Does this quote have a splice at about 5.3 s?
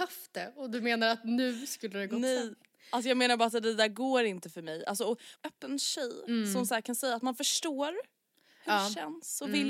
yes; 1 cut; at 5.3 s

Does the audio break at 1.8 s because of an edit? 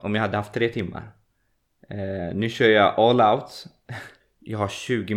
no; 1 cut; at 4.2 s

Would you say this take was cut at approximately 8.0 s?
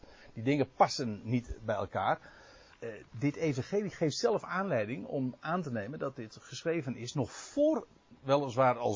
no; 1 cut; at 2.7 s

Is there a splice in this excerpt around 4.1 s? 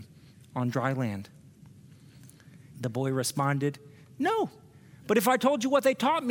no; 1 cut; at 2.7 s

